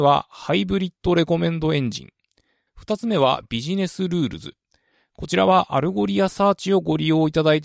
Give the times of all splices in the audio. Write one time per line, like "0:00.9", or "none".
0:02.7